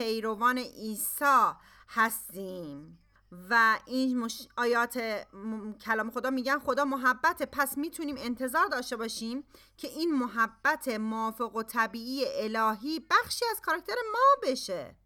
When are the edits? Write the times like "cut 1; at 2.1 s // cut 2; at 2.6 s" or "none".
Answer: none